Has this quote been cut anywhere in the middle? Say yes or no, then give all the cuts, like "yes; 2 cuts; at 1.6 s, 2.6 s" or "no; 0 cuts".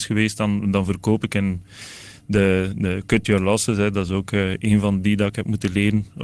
no; 0 cuts